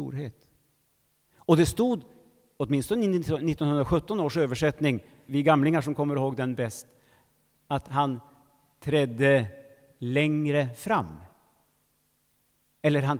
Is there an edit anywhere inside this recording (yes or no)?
yes